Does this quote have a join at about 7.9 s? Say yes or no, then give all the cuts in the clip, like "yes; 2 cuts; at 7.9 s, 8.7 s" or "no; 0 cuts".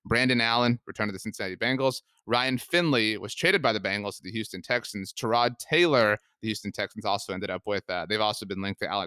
no; 0 cuts